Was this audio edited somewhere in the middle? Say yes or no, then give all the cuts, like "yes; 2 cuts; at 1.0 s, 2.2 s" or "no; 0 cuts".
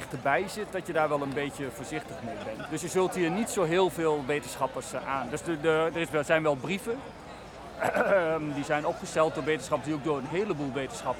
yes; 1 cut; at 2.7 s